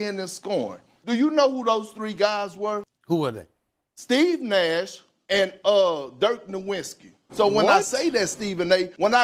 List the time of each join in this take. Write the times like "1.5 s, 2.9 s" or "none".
5.2 s, 7.3 s